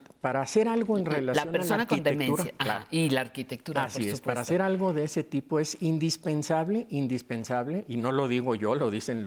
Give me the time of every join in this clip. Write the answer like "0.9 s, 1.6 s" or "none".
none